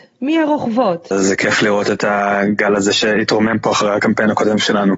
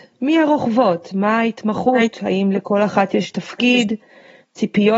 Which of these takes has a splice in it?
first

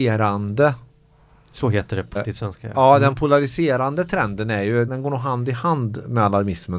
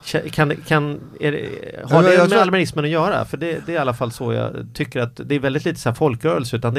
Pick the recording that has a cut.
first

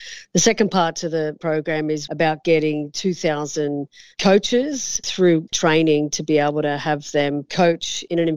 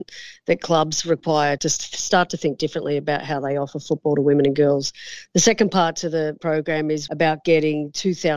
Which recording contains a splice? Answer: second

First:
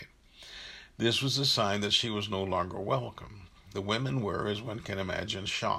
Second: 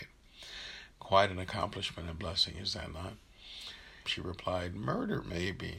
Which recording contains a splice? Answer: second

